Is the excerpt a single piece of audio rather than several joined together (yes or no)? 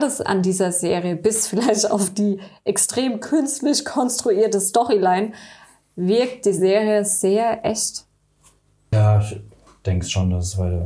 no